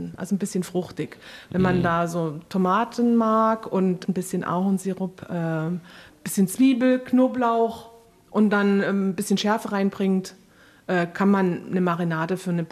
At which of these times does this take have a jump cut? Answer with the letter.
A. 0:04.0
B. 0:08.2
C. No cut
A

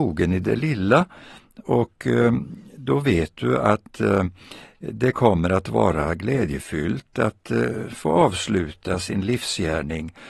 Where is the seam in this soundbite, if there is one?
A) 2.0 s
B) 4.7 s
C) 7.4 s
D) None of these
D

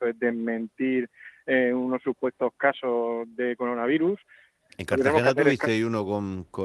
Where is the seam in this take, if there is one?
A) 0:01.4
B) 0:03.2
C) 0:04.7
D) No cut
C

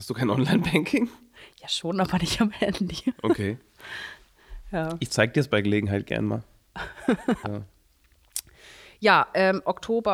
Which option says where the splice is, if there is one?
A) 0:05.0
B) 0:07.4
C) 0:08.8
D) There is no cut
B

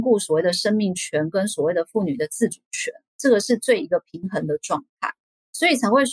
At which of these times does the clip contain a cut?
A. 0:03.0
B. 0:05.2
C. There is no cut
C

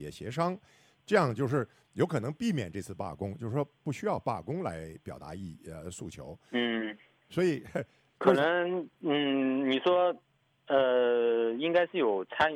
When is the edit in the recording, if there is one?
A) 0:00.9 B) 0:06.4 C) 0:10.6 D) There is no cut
D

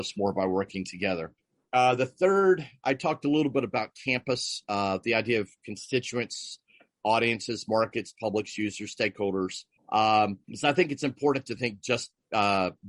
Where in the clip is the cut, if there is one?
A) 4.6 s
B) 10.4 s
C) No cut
B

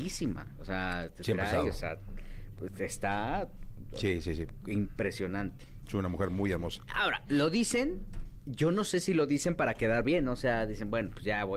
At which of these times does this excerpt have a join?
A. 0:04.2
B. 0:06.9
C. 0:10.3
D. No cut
B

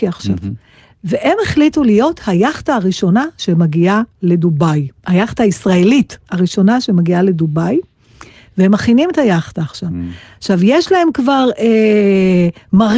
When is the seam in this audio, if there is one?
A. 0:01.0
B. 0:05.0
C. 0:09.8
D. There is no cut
B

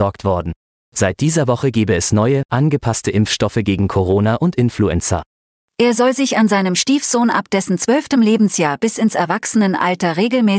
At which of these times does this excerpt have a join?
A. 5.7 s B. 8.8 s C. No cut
A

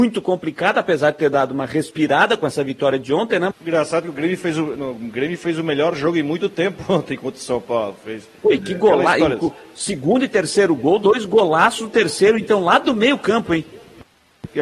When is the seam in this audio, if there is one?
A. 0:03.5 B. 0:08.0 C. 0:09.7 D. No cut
A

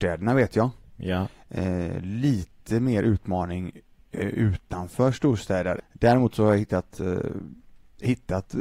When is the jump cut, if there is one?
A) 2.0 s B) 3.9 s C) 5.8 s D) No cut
C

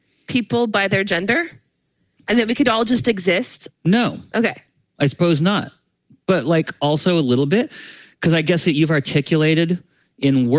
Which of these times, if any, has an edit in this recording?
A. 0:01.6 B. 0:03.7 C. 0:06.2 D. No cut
B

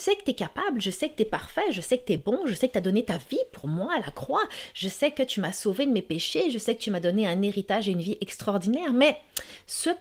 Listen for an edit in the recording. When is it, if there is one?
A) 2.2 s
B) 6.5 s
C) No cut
C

